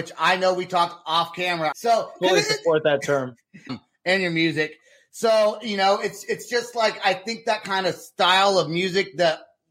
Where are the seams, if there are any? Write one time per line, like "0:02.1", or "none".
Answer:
0:01.7
0:03.7

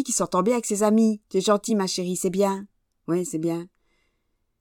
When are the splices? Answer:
none

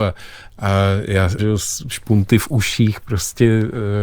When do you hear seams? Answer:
0:01.4

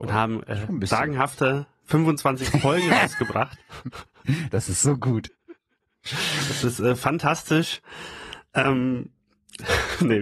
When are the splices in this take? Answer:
none

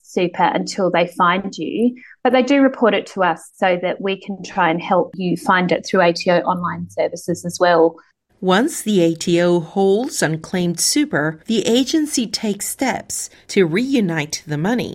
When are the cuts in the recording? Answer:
0:08.3
0:11.4

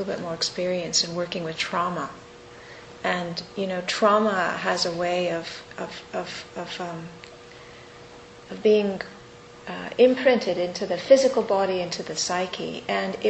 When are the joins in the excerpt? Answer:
none

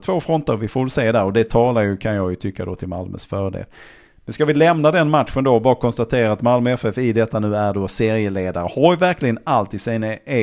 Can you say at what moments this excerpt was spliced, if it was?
none

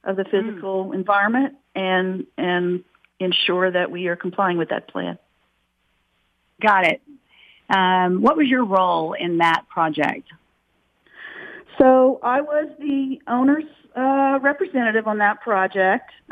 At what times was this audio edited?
0:07.6

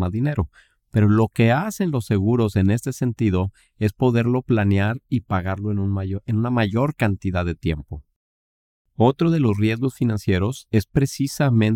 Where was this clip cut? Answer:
none

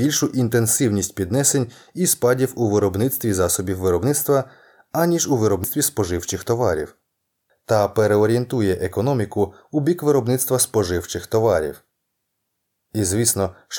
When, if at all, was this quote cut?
0:07.5

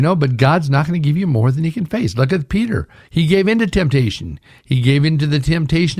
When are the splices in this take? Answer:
none

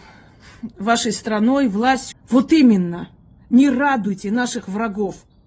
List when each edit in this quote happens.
0:02.1

